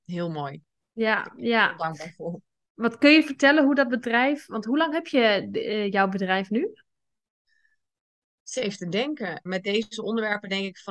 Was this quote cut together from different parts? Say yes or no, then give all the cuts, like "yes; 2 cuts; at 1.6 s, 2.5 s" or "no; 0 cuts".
yes; 1 cut; at 9.5 s